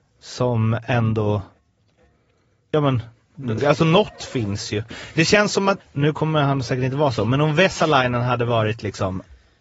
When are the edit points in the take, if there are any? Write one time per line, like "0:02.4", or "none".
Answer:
0:03.6
0:05.8